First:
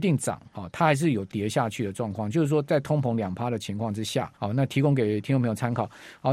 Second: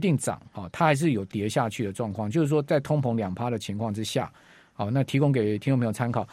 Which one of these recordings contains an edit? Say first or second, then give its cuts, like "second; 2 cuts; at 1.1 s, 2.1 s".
first; 1 cut; at 4.3 s